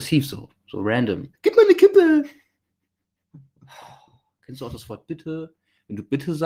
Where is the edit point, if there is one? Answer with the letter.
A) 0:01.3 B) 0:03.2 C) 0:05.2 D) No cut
A